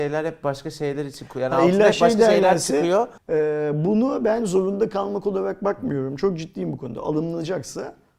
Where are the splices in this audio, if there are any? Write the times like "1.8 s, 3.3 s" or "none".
3.2 s

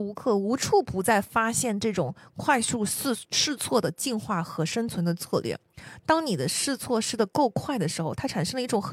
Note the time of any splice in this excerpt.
none

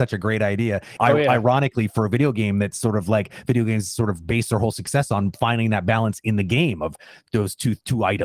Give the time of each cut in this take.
1.0 s

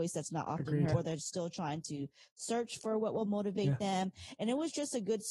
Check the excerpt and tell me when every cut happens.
0.9 s

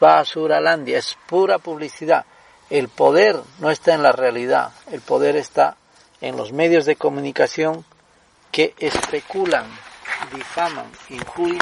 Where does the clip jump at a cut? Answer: none

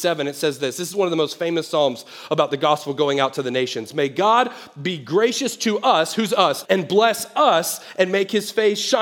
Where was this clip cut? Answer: 6.6 s

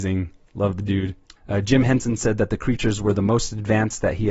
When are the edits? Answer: 1.4 s

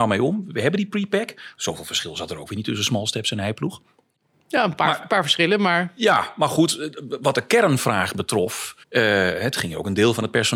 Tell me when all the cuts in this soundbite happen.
8.8 s

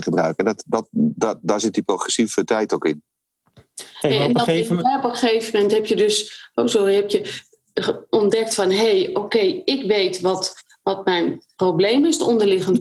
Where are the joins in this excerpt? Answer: none

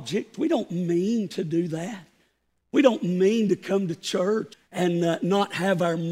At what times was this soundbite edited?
4.5 s

